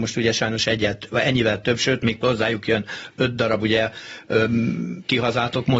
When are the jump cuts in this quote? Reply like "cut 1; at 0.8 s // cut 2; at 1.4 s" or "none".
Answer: cut 1; at 2.2 s